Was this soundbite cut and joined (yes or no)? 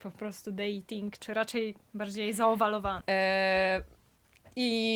yes